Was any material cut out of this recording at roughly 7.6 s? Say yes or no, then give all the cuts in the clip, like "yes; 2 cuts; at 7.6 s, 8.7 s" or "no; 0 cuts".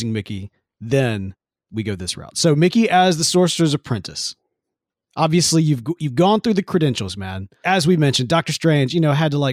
yes; 1 cut; at 7.6 s